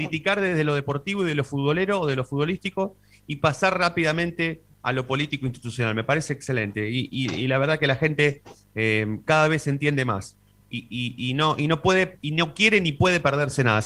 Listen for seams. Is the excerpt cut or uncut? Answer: uncut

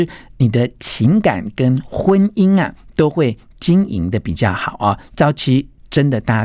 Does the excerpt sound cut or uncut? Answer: uncut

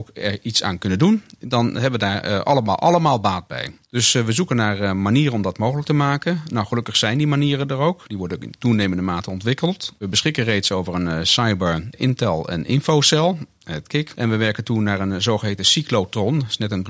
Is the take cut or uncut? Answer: uncut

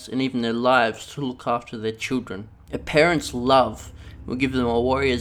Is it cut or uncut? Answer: cut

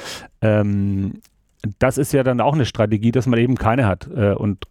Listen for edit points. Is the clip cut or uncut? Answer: uncut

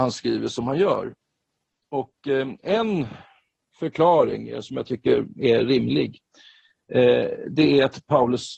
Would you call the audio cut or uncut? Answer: uncut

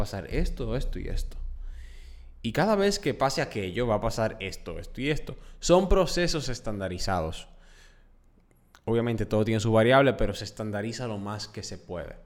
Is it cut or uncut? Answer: uncut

